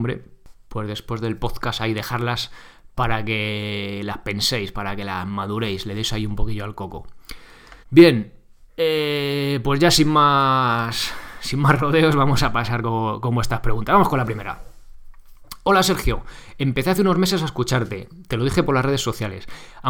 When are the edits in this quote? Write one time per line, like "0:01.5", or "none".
0:07.8